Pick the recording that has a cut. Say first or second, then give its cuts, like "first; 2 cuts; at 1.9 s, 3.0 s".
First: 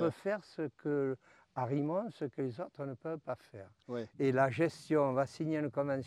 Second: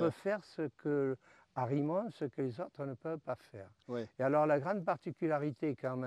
first; 1 cut; at 4.1 s